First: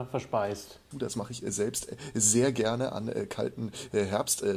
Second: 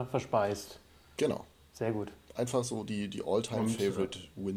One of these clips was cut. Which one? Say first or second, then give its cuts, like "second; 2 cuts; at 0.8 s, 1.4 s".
first; 1 cut; at 0.9 s